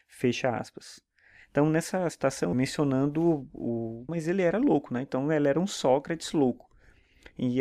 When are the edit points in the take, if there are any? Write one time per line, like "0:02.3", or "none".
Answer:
0:02.5
0:04.1